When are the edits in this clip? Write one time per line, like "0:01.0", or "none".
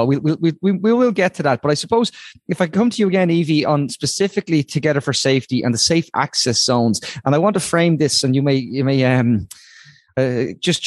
none